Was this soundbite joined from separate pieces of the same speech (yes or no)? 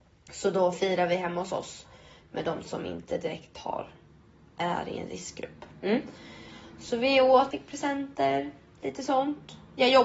yes